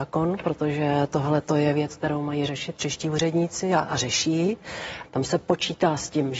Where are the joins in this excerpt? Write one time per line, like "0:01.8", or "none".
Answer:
0:05.0